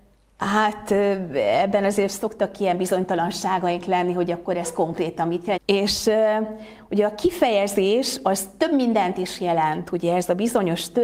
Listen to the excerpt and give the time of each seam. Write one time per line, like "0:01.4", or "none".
0:05.6